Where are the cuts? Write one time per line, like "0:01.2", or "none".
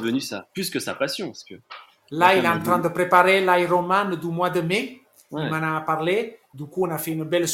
none

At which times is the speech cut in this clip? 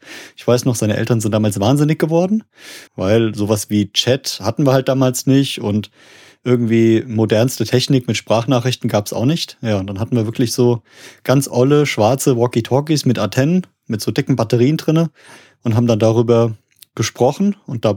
0:02.9

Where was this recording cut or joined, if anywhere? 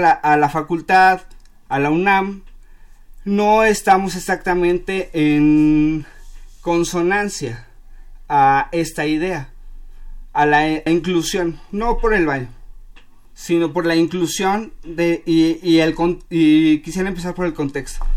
0:10.9

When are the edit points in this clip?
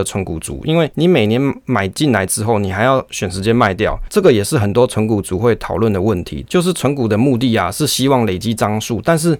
0:04.1

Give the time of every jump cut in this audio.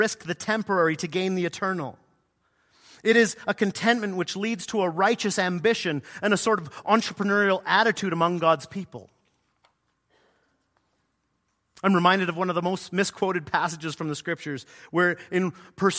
none

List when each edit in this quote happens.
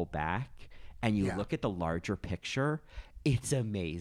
none

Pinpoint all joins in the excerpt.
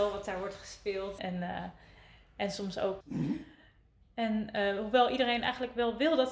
0:01.2
0:03.0

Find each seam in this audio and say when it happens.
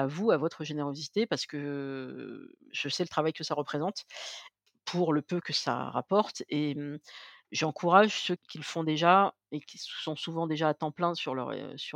none

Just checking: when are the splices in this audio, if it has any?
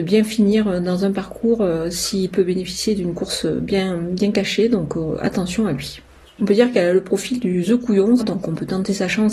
0:06.2
0:08.2

